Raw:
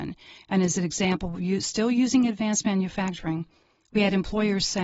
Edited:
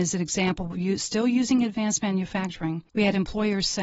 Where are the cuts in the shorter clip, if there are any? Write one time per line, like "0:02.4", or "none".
0:02.9